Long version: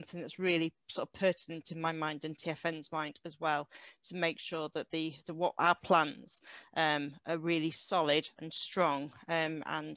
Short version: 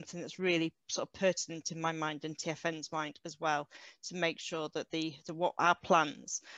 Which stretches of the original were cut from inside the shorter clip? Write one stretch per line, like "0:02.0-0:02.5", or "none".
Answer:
none